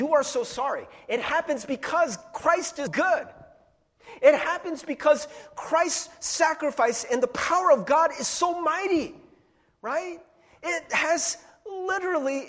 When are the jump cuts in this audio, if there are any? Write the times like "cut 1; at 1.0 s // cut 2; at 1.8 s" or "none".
cut 1; at 2.9 s